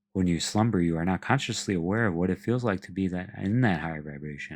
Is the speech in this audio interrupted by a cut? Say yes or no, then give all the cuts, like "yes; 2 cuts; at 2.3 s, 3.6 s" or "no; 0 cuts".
no; 0 cuts